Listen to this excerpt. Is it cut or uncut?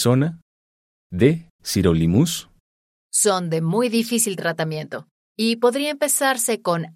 cut